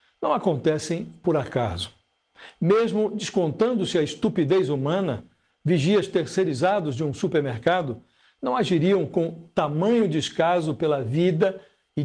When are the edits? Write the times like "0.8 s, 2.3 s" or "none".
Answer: none